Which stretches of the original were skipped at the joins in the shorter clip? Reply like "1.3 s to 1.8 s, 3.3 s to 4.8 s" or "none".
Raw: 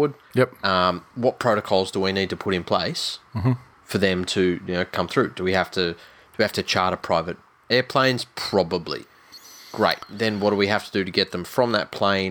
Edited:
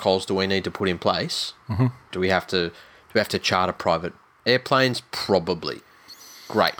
3.8 s to 5.3 s